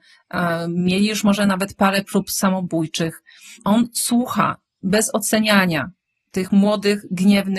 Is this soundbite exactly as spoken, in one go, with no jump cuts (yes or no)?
yes